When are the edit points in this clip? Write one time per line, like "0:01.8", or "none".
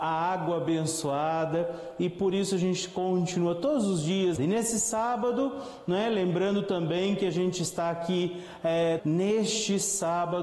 0:04.4
0:09.0